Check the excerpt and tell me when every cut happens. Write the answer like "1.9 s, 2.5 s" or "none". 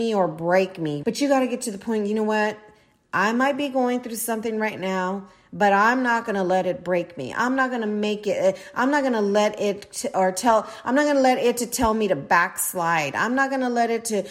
1.0 s